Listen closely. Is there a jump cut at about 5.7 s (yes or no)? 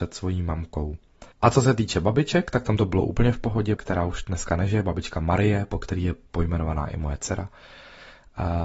no